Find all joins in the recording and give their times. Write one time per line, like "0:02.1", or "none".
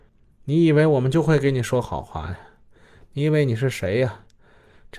none